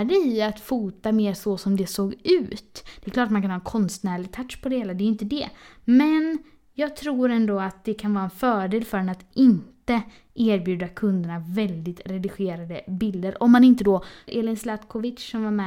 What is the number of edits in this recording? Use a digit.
1